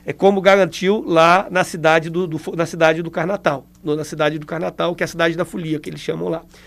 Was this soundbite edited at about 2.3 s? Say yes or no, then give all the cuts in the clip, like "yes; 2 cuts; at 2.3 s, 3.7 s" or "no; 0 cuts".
yes; 1 cut; at 2.3 s